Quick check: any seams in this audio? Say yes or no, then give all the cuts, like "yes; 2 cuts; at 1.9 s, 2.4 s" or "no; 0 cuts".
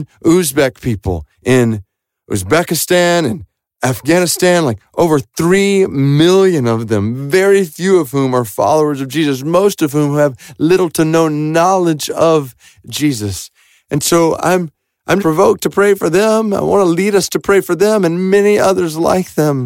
yes; 1 cut; at 15.2 s